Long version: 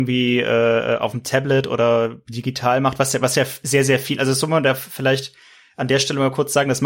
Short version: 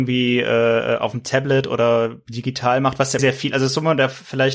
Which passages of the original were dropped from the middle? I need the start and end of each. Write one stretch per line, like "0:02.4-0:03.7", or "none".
0:03.2-0:03.8